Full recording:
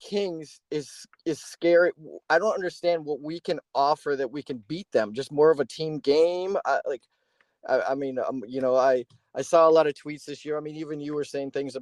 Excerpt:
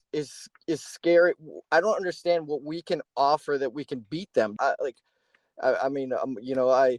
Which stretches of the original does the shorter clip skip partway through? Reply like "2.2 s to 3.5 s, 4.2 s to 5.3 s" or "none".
5.1 s to 6.6 s

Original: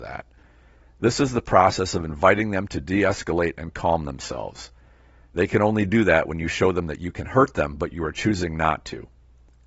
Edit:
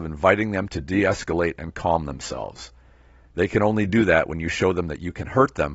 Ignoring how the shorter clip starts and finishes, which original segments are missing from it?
none

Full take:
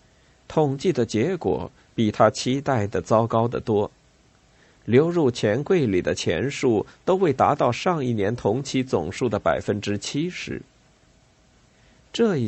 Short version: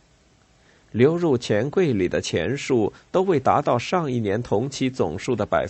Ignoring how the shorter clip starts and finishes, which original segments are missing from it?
none

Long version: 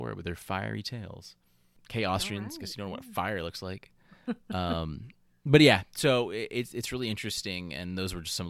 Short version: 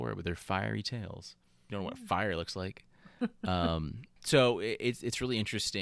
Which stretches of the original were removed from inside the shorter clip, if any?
1.7 s to 2.8 s, 5.2 s to 5.9 s

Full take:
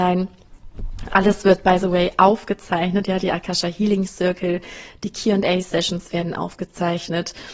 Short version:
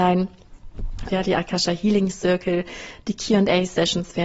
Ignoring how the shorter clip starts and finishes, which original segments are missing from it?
1.1 s to 3.0 s

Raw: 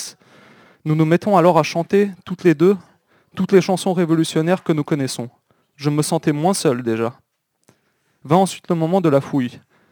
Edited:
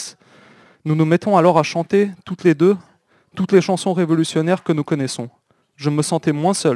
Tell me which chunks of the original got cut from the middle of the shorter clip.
none

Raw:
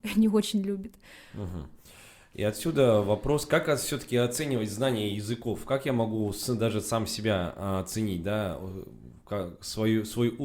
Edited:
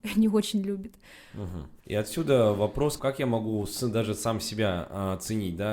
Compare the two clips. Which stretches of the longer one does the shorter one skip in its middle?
1.8 s to 2.3 s, 3.5 s to 5.6 s

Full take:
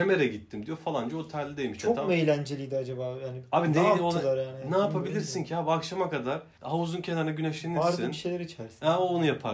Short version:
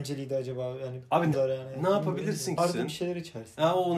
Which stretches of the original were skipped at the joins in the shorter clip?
3.7 s to 4.2 s, 5.5 s to 7.8 s

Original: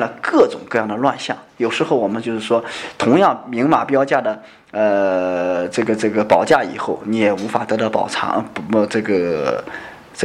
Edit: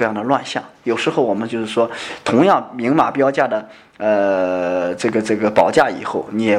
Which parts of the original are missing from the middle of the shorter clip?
none

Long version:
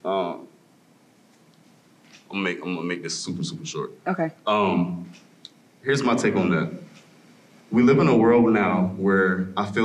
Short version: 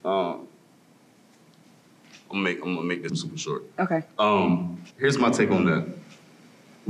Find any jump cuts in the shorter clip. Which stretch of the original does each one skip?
3.1 s to 3.4 s, 5.2 s to 5.8 s

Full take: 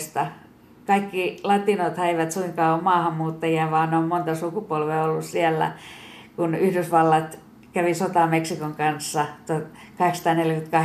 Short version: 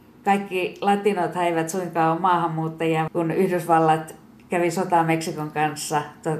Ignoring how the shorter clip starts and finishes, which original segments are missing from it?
3.7 s to 6.3 s

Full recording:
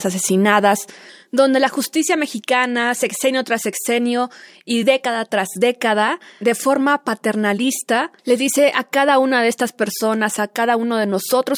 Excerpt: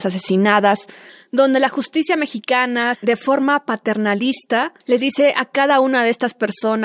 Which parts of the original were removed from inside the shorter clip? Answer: 2.9 s to 6.3 s

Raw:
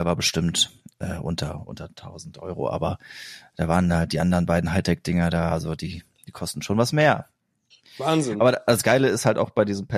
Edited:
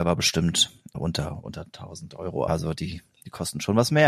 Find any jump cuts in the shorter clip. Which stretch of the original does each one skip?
0.9 s to 1.2 s, 2.7 s to 5.5 s

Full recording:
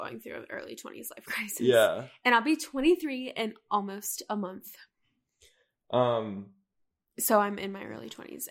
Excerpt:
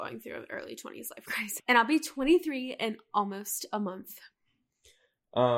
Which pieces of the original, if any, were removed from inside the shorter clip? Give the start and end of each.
1.6 s to 2.1 s

